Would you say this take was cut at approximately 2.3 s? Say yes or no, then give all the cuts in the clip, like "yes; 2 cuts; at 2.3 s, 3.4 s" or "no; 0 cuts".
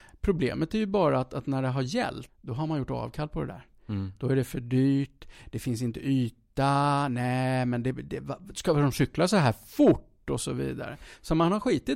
yes; 1 cut; at 2.3 s